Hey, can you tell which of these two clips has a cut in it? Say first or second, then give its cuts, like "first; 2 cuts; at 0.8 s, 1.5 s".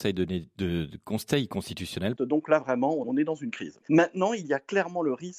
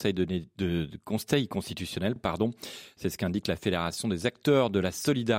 first; 1 cut; at 2.2 s